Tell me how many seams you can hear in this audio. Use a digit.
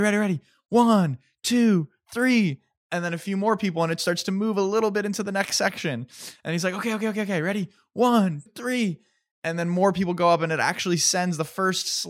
1